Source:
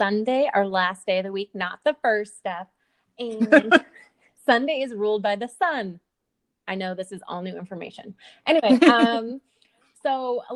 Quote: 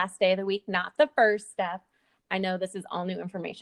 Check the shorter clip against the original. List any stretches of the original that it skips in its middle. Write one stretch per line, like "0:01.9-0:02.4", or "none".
0:03.0-0:06.5

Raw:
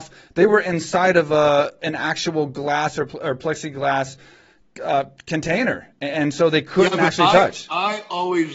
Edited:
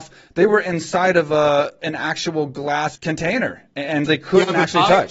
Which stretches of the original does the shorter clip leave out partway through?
0:03.0-0:05.2
0:06.3-0:06.5

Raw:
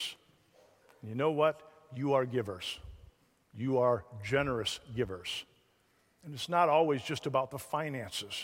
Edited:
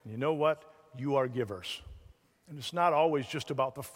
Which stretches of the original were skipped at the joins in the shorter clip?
0:03.3-0:06.1

